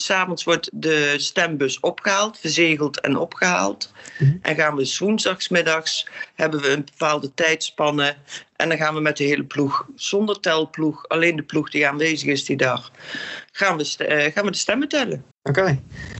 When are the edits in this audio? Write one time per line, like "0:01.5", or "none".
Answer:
0:15.3